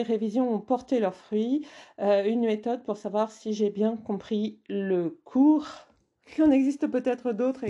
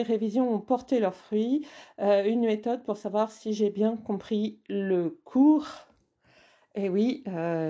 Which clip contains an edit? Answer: first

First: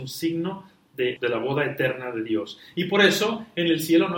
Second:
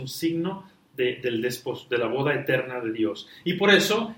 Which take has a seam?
first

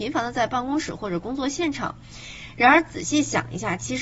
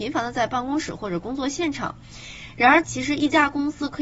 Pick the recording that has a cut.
second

